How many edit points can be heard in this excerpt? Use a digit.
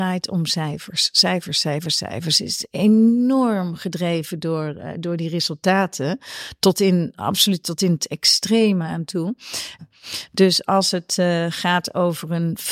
1